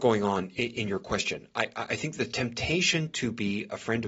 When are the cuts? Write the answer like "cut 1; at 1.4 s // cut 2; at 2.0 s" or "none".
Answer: none